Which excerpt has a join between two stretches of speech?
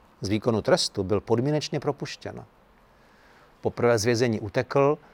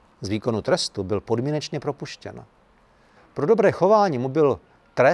second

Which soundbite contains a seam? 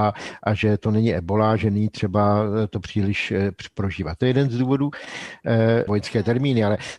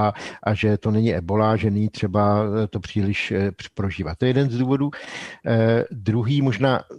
first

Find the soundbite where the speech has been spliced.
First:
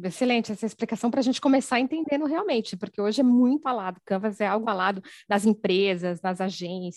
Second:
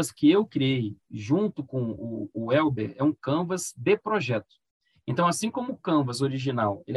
first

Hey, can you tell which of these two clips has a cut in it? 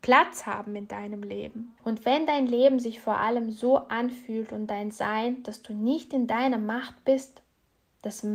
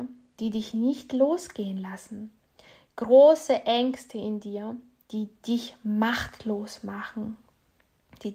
first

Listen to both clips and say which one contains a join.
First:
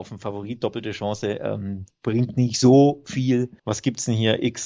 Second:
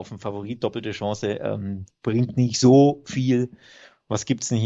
first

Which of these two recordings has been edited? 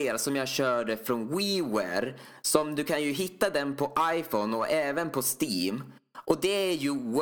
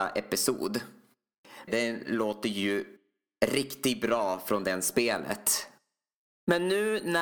second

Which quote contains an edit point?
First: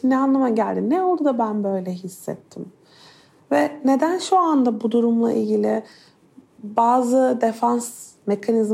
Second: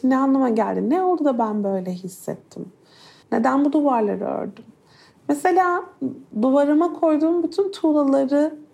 second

